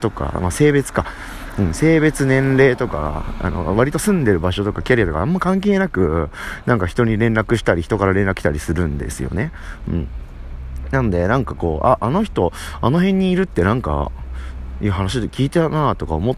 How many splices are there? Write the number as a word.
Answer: zero